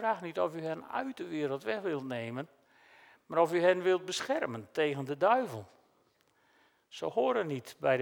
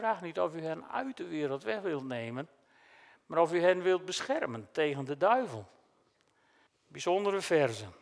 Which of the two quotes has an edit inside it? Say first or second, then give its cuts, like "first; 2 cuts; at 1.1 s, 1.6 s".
second; 1 cut; at 6.7 s